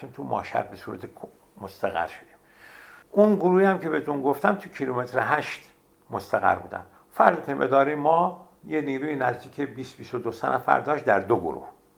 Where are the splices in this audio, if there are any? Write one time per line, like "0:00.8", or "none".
0:03.0
0:08.6